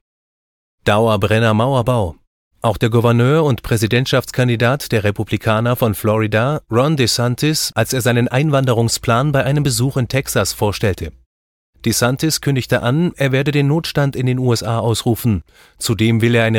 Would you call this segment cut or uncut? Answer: cut